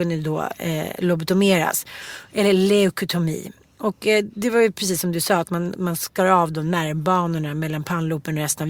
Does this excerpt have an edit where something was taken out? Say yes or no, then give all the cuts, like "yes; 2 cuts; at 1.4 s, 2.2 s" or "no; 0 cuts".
no; 0 cuts